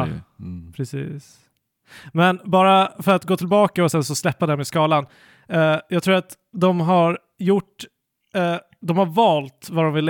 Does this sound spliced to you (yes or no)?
no